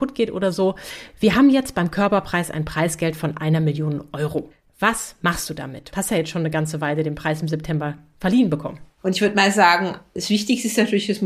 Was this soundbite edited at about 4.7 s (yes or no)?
no